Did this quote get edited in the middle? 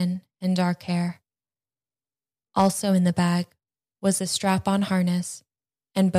yes; 1 cut; at 2.4 s

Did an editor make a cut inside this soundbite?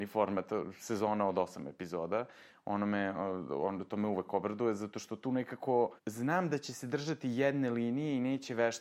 yes; 1 cut; at 6.0 s

